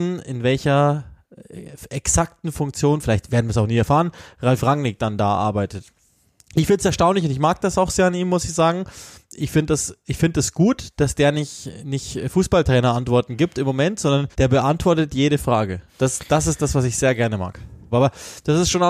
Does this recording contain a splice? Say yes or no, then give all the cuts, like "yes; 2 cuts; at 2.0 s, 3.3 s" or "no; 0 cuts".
yes; 3 cuts; at 14.3 s, 15.9 s, 17.9 s